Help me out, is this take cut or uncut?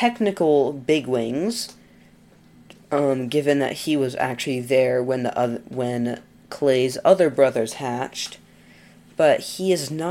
uncut